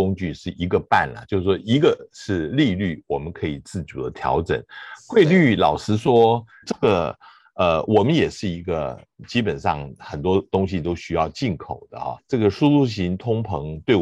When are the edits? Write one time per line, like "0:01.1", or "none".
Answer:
0:06.6
0:12.2